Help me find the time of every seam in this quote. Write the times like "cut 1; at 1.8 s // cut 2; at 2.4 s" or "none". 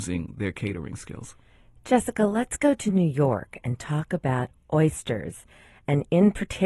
none